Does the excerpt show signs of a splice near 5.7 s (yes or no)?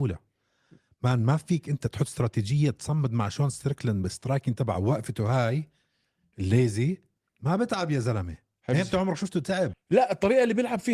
no